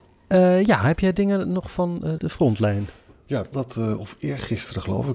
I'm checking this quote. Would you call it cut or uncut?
cut